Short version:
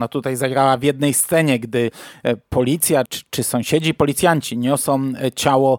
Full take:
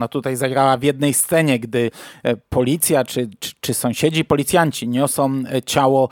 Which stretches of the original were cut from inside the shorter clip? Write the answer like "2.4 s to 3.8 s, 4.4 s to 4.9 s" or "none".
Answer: 3.1 s to 3.4 s